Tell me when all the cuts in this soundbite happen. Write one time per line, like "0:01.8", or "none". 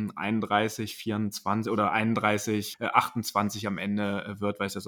0:02.7